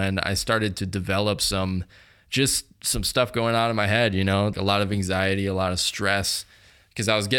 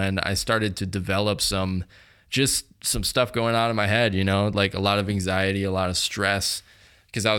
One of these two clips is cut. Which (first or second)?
first